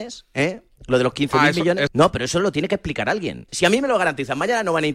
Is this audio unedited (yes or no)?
no